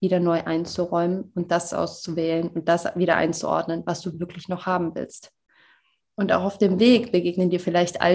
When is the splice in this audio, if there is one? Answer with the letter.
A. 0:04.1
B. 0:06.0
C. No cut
C